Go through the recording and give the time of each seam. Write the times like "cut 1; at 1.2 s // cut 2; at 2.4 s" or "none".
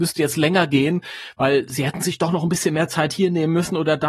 none